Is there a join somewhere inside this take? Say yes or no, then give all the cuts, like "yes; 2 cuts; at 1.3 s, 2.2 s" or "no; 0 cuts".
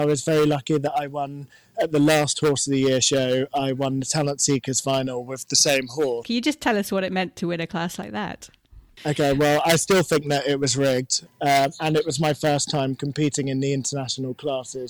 yes; 3 cuts; at 6.2 s, 8.9 s, 11.3 s